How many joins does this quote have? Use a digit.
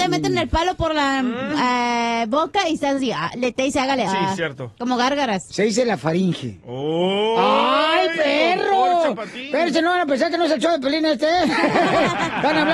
1